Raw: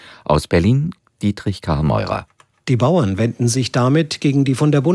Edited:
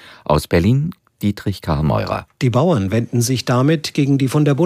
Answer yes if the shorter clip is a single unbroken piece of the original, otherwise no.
no